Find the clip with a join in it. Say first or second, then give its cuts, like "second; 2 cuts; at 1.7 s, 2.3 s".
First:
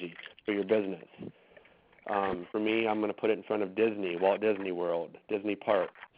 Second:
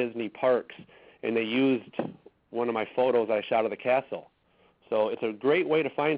second; 1 cut; at 4.7 s